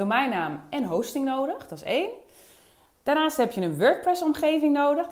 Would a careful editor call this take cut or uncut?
uncut